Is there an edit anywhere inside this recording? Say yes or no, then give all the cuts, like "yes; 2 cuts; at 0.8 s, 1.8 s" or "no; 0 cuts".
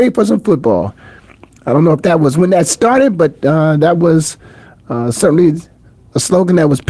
no; 0 cuts